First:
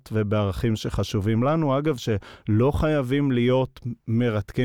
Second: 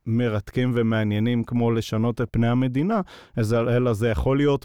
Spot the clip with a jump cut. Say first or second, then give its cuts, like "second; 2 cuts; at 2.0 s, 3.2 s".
second; 1 cut; at 2.3 s